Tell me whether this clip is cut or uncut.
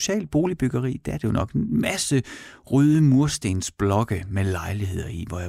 uncut